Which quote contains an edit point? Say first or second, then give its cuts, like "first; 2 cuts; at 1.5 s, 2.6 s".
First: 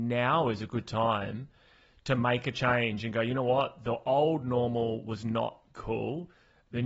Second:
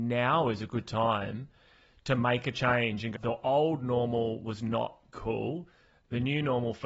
second; 1 cut; at 3.1 s